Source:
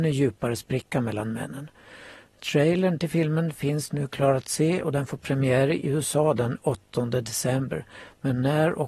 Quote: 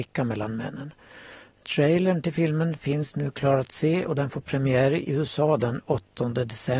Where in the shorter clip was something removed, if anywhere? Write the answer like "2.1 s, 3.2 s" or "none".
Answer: none